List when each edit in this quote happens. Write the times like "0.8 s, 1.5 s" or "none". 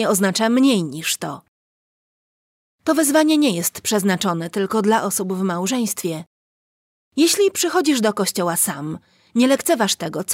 none